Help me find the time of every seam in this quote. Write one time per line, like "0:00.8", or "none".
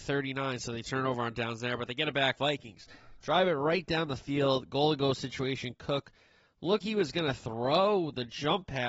0:02.3
0:06.8